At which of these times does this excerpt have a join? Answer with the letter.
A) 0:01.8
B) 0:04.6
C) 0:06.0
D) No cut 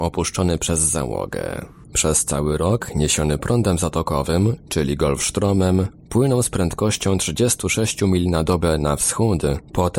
A